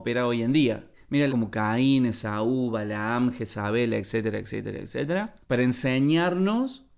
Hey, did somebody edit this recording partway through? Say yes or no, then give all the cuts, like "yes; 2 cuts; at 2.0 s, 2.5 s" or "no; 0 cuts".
yes; 1 cut; at 1.3 s